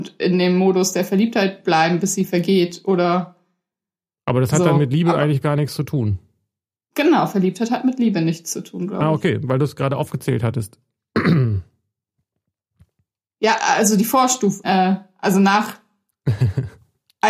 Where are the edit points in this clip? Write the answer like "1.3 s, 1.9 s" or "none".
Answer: 14.6 s